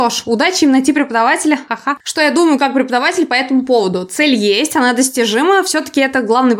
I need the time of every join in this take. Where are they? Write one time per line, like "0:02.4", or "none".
0:02.0